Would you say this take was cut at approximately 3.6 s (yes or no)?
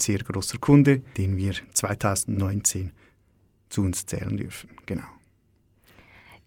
no